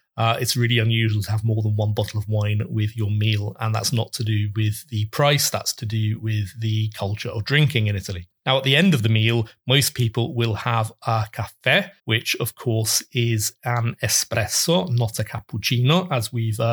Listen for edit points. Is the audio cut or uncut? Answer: cut